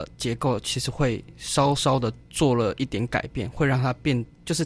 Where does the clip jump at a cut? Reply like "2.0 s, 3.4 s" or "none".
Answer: none

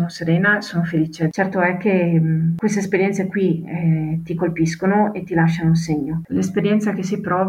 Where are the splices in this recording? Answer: 6.3 s

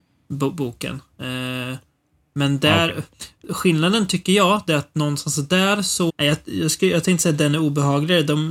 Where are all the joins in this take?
6.1 s

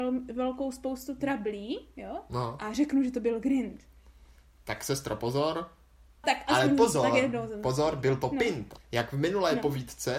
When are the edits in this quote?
6.2 s, 8.8 s

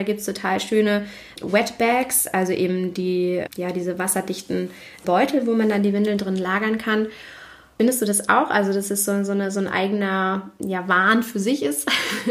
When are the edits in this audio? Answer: none

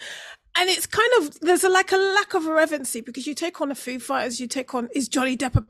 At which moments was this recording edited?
none

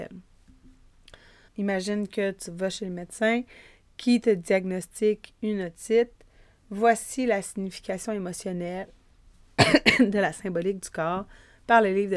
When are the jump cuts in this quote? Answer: 1.5 s

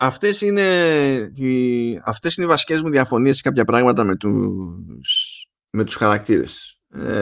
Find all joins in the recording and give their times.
none

